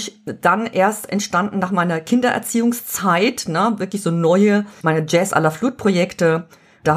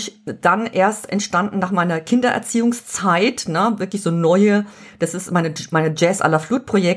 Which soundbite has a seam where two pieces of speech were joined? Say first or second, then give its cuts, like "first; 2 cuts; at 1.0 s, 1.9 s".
first; 1 cut; at 4.8 s